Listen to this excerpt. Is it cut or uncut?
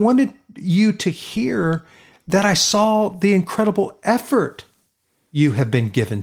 uncut